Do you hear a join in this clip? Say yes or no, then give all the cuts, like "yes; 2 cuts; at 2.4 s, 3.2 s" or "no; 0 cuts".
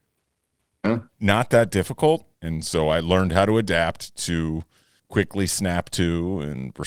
yes; 2 cuts; at 2.3 s, 5.0 s